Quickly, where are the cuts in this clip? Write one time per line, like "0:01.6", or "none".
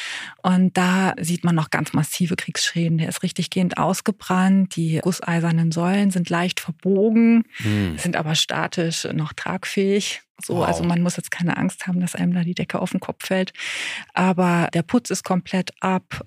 0:05.0